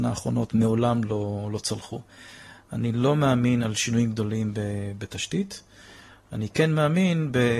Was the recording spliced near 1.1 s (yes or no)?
no